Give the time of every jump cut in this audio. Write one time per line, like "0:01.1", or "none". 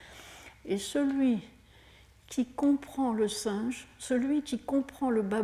none